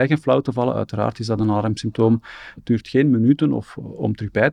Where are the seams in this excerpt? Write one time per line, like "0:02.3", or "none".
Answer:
0:02.6